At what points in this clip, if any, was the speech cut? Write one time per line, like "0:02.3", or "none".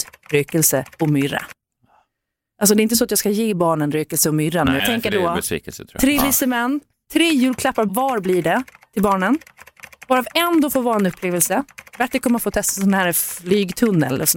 0:04.8